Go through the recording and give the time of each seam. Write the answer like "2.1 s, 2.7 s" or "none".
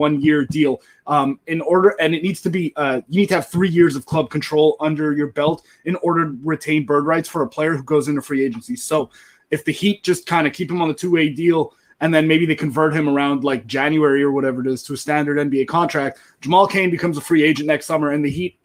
none